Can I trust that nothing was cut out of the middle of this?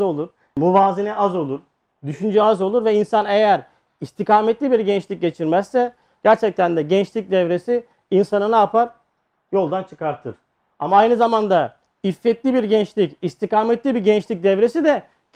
no; 1 cut; at 6.1 s

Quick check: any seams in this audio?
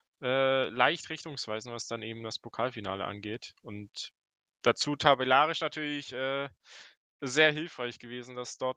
no; 0 cuts

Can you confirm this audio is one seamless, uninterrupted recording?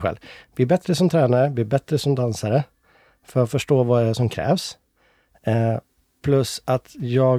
yes; 0 cuts

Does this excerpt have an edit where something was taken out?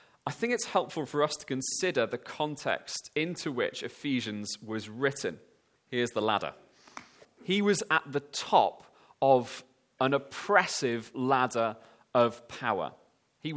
yes; 2 cuts; at 5.8 s, 7.2 s

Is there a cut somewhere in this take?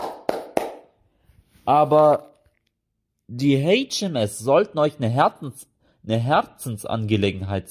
no; 0 cuts

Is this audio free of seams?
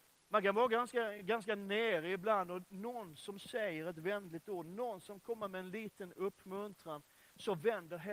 yes; 0 cuts

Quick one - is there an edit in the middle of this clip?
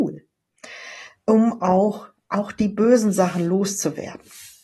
no; 0 cuts

